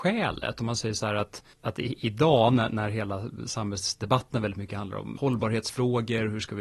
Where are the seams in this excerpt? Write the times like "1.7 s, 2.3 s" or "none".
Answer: 1.5 s